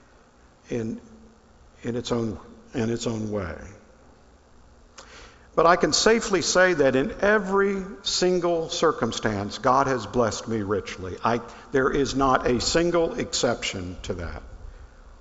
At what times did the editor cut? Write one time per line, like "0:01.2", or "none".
none